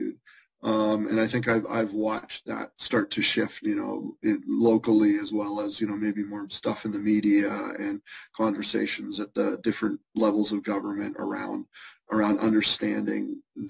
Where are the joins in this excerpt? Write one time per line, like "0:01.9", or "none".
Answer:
0:03.6